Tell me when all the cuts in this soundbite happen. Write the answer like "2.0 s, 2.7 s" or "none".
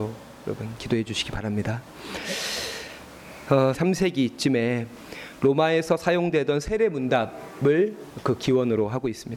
3.7 s